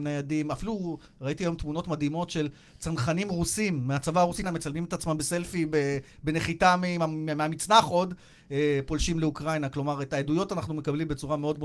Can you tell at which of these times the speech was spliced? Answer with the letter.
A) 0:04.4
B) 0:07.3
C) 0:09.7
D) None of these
A